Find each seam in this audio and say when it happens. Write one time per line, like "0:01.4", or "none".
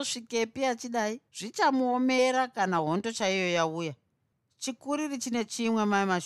0:01.3